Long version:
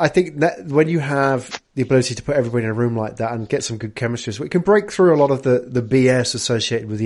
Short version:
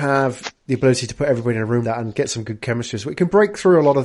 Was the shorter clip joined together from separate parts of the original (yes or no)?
yes